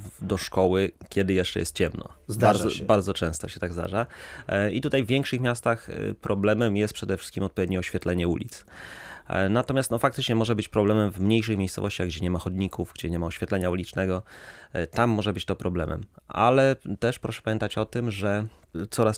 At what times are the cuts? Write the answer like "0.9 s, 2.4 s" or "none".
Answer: none

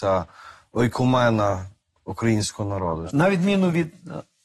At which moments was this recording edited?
3.1 s

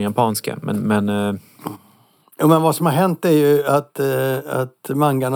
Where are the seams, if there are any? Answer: none

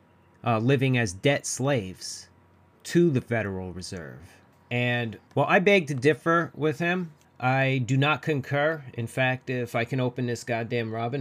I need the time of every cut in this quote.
none

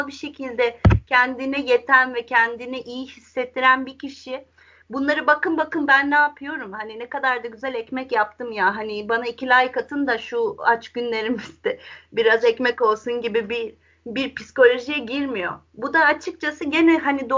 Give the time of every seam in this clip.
none

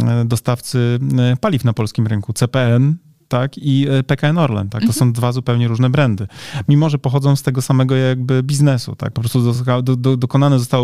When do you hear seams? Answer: none

